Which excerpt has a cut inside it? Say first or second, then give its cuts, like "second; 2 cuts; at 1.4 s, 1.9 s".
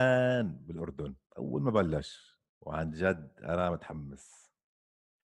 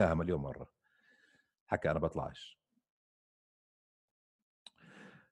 first; 2 cuts; at 1.3 s, 2.5 s